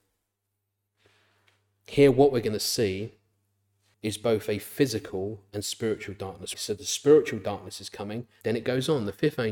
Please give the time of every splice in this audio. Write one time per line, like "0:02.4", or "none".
0:03.9
0:06.5
0:08.4